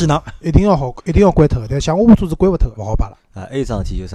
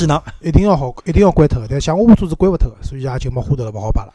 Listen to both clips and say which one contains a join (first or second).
first